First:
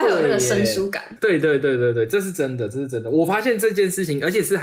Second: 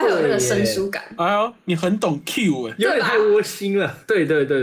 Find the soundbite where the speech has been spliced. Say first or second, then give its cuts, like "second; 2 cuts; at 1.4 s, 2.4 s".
first; 1 cut; at 1.2 s